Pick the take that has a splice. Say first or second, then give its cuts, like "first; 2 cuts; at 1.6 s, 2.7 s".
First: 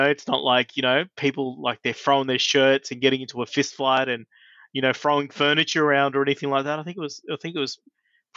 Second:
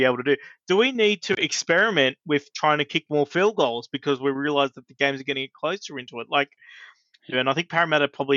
second; 1 cut; at 7.3 s